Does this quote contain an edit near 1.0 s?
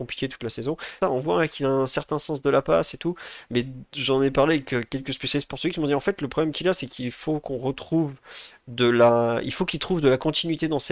yes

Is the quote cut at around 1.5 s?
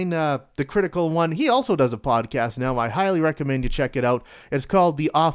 no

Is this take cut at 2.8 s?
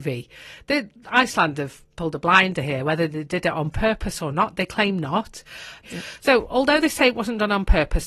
no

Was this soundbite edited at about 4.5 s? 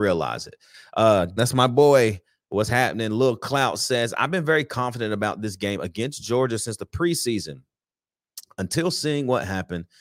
no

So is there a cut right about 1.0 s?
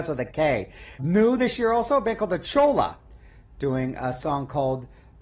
yes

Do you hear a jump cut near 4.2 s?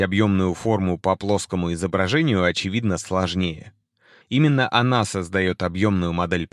yes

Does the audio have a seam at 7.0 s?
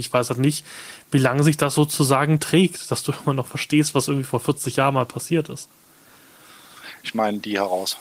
yes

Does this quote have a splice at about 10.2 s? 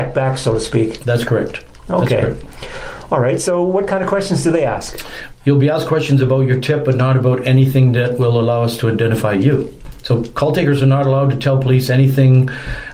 no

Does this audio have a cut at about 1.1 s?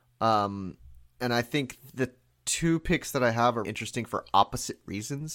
no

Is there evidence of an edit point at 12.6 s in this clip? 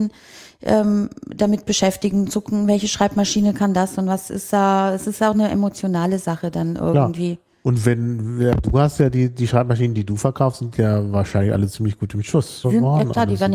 yes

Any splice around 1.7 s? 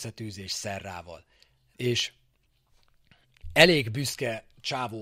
yes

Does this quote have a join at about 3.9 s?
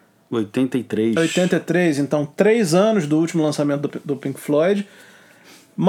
no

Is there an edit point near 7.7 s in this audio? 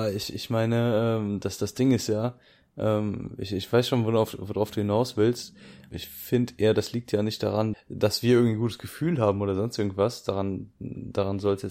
yes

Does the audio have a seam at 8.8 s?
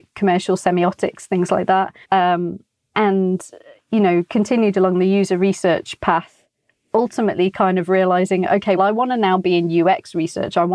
yes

